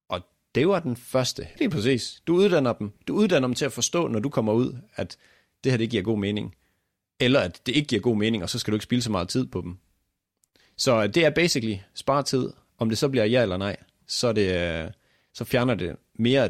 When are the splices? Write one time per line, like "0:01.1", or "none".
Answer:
0:01.6